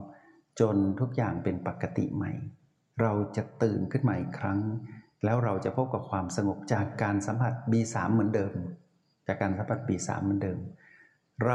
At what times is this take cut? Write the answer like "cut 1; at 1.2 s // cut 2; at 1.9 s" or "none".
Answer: none